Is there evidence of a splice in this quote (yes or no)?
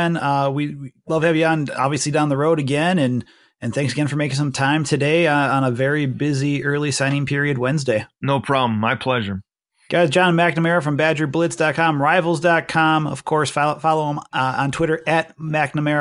yes